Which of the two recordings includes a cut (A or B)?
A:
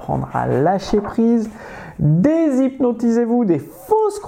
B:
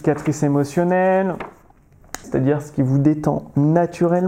B